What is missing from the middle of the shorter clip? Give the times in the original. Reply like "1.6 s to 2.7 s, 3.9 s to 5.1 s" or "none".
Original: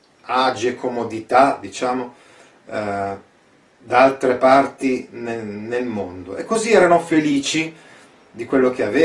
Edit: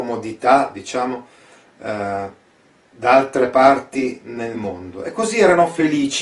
5.4 s to 5.9 s